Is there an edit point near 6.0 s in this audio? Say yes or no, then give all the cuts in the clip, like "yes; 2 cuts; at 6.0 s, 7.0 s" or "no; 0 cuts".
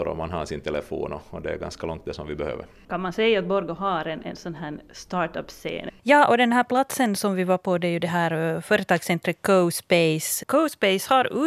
yes; 2 cuts; at 2.8 s, 6.0 s